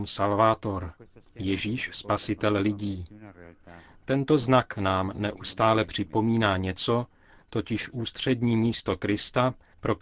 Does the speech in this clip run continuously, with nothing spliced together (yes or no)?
no